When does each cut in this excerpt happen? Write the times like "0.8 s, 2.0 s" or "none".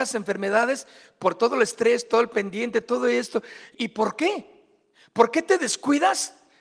3.7 s